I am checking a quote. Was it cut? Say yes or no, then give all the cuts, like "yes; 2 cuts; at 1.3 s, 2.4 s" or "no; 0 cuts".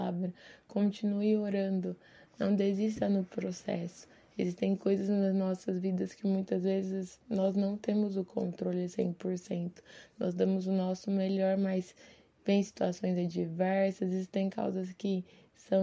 no; 0 cuts